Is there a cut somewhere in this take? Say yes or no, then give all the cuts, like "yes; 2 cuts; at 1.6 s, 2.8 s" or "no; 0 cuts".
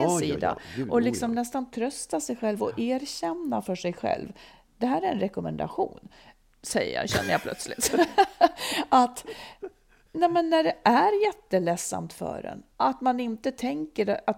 yes; 1 cut; at 12.7 s